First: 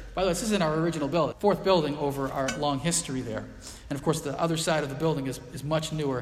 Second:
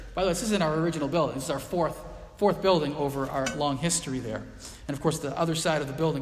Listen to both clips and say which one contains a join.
first; 1 cut; at 1.3 s

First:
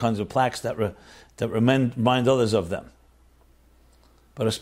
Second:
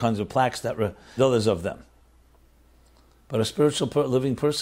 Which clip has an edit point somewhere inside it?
second; 1 cut; at 1.2 s

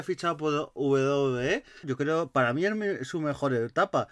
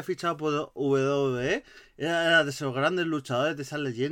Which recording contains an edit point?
first; 1 cut; at 1.8 s

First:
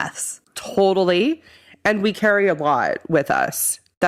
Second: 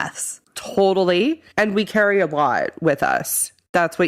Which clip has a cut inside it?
second; 1 cut; at 1.5 s

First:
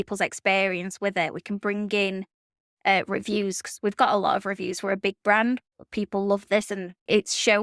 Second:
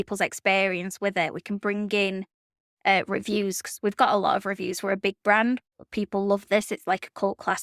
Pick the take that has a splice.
first; 1 cut; at 6.7 s

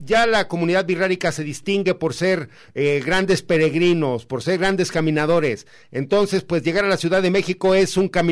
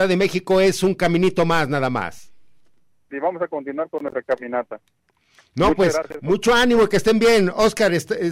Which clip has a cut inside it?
second; 1 cut; at 3.1 s

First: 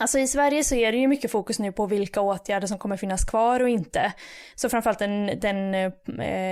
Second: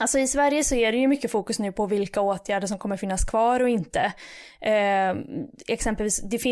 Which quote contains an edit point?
first; 1 cut; at 4.5 s

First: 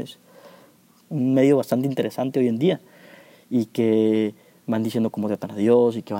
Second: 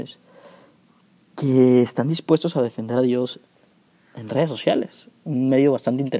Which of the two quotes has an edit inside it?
first; 1 cut; at 1.0 s

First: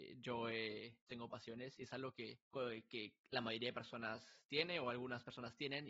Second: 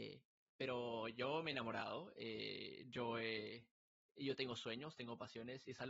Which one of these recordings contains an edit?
first; 2 cuts; at 1.1 s, 2.4 s

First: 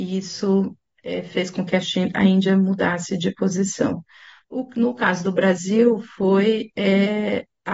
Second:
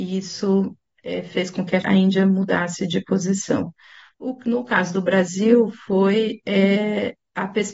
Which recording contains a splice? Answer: second; 1 cut; at 1.8 s

